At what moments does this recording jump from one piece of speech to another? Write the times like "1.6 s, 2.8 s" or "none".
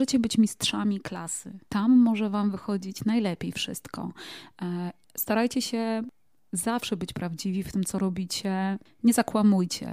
1.7 s, 5.0 s